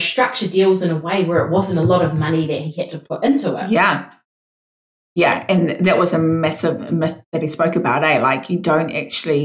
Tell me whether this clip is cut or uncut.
uncut